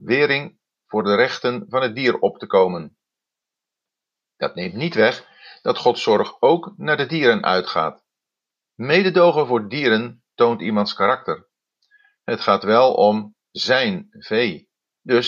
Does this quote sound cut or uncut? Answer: uncut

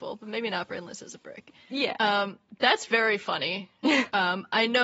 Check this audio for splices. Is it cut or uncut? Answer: uncut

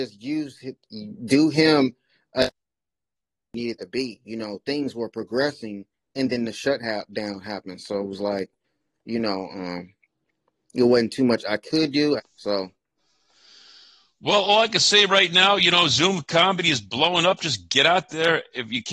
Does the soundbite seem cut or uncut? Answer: cut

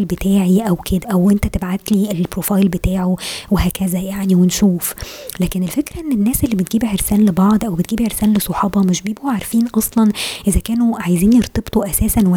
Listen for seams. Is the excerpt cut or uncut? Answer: cut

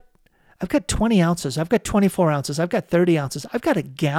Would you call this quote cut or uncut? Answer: uncut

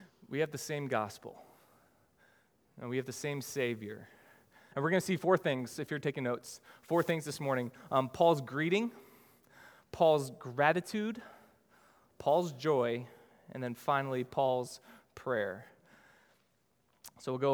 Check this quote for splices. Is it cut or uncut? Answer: cut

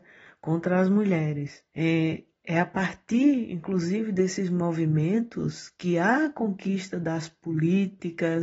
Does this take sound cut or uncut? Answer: cut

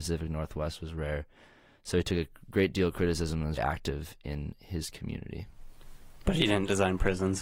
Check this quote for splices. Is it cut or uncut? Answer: cut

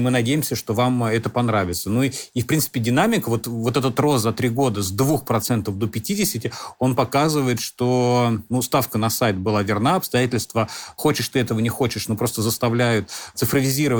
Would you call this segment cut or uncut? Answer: uncut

